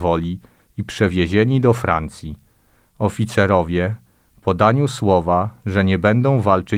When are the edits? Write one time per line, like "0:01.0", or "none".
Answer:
none